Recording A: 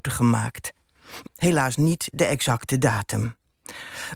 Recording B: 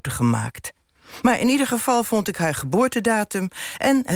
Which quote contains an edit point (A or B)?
A